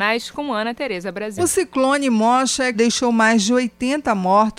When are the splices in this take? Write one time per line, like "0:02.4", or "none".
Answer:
0:01.4
0:02.7